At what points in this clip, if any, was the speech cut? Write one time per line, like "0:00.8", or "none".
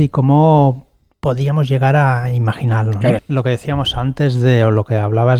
0:03.2